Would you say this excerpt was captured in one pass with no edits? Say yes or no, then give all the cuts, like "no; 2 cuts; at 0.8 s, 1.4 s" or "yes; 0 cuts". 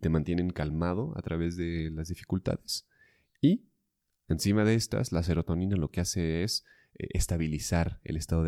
yes; 0 cuts